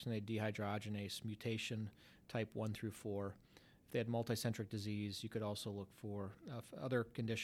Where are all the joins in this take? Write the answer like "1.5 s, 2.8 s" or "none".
none